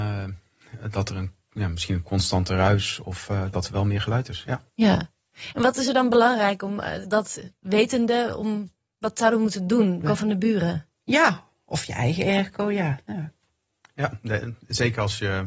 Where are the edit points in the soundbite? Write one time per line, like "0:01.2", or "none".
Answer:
0:07.0
0:10.0